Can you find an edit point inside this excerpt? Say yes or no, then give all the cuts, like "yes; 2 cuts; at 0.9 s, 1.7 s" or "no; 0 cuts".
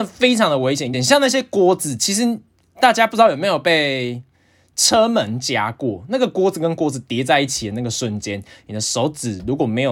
yes; 1 cut; at 0.9 s